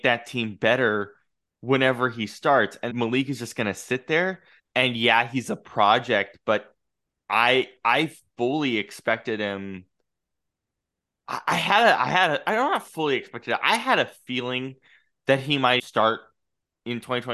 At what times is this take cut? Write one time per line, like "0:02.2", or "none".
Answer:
0:02.9
0:04.6
0:15.8